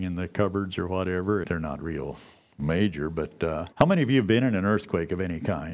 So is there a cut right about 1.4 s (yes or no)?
yes